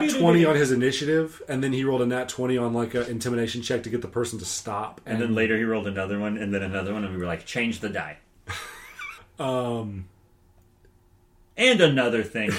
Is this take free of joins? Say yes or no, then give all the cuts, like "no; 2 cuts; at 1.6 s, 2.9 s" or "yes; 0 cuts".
no; 1 cut; at 9.2 s